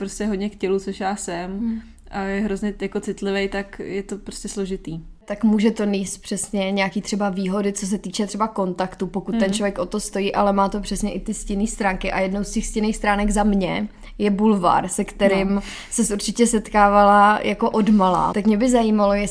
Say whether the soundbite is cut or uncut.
cut